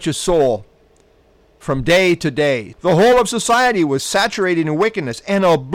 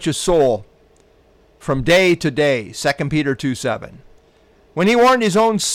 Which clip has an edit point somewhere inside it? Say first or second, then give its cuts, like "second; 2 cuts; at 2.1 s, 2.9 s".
first; 1 cut; at 2.7 s